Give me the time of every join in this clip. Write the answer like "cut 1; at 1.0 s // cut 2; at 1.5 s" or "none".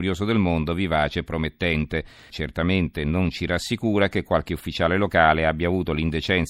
cut 1; at 2.3 s